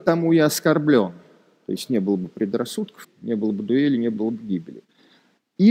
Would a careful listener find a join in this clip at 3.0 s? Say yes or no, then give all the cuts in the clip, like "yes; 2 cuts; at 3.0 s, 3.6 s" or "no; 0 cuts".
yes; 1 cut; at 3.0 s